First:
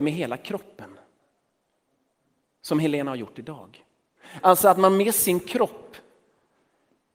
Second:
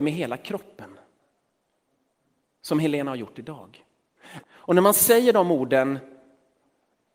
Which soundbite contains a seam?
second; 1 cut; at 4.4 s

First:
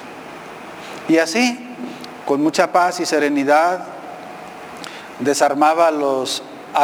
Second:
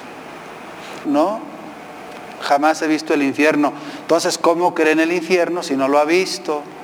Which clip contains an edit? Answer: second; 1 cut; at 1.0 s

